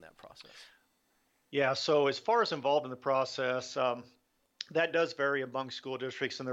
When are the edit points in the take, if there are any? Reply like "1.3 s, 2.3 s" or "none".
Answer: none

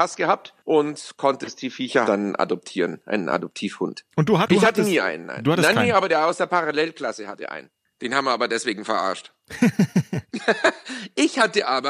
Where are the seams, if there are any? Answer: 2.0 s

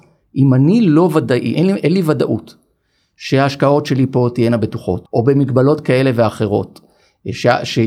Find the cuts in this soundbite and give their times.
1.5 s, 5.0 s

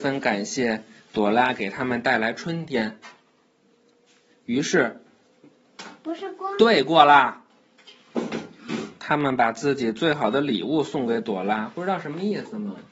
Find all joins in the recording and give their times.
none

